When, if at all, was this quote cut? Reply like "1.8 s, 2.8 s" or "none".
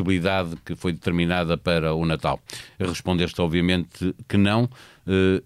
none